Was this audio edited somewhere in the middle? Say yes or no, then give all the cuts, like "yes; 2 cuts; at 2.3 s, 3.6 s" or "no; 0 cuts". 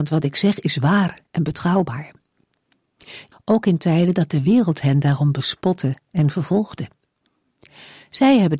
yes; 1 cut; at 3.3 s